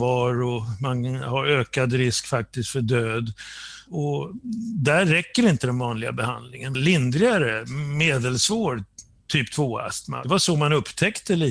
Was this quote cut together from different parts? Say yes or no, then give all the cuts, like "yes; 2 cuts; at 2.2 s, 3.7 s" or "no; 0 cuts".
yes; 1 cut; at 6.7 s